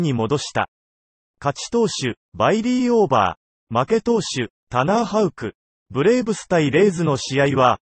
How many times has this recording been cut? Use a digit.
0